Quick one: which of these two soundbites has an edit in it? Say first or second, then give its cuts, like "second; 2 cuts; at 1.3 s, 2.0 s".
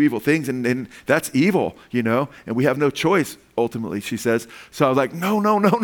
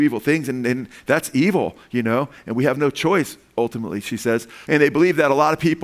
second; 1 cut; at 4.6 s